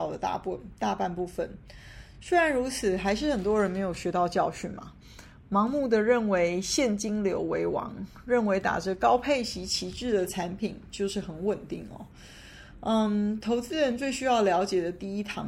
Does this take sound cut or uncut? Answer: uncut